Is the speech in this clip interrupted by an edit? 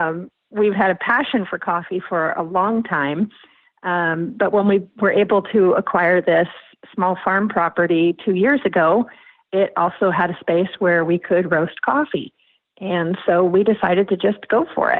no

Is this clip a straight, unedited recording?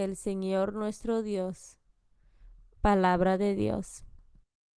no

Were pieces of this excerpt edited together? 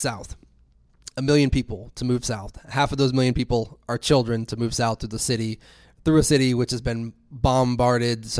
no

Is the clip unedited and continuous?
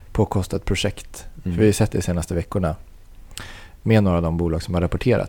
yes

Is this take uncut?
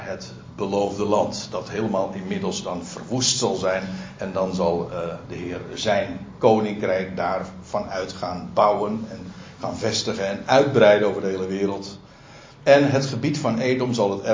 yes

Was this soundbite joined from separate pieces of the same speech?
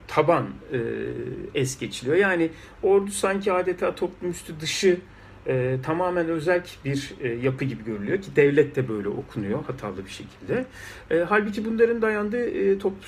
no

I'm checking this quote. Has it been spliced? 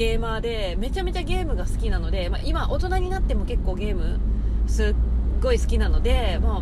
no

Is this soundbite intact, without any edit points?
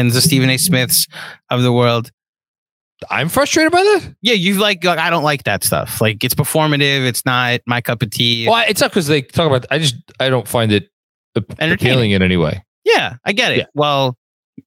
yes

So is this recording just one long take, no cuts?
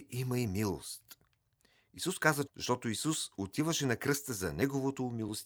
no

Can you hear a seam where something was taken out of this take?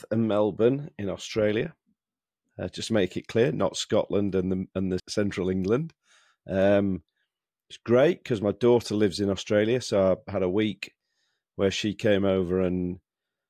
yes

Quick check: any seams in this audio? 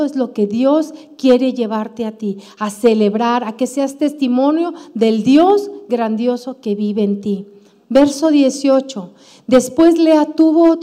no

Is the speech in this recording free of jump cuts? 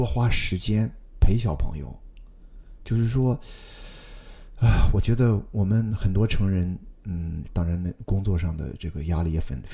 no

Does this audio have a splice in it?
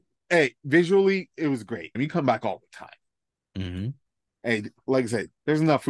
yes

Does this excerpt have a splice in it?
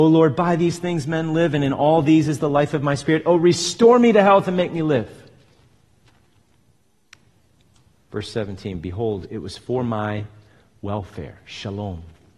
no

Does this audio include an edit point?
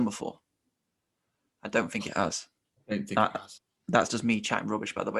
no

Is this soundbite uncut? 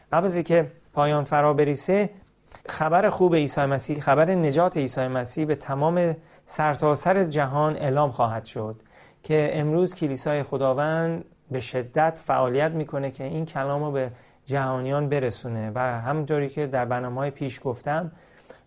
no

